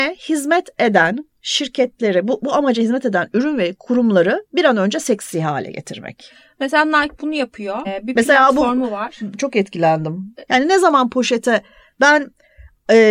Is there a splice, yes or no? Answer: yes